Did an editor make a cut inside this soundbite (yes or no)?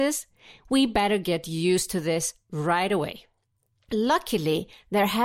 no